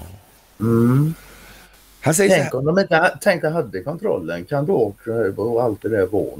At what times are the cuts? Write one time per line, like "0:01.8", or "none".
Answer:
0:03.4
0:04.7